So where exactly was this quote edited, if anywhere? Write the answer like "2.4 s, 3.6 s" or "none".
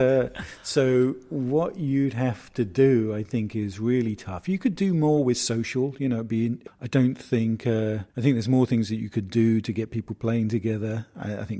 6.7 s, 8.1 s